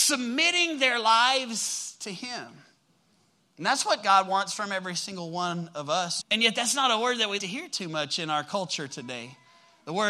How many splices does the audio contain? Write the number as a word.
two